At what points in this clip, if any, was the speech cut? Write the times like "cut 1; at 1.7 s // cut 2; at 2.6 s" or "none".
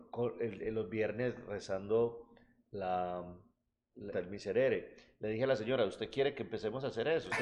cut 1; at 4.1 s